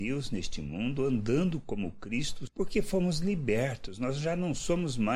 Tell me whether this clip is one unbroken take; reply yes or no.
no